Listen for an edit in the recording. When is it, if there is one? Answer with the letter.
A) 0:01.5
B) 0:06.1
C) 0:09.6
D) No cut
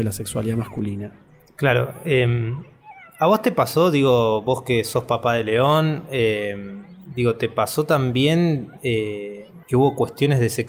C